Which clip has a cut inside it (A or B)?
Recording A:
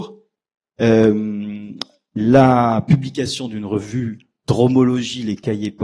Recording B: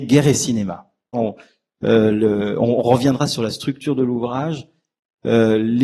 B